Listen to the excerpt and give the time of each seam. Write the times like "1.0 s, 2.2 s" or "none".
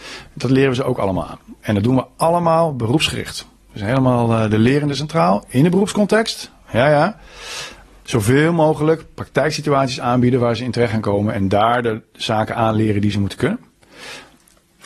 none